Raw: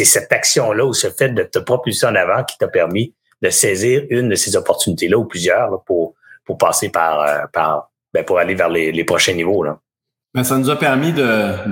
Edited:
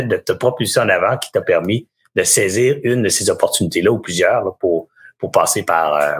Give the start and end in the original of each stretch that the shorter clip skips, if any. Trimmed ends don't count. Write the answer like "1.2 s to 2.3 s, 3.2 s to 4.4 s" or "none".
none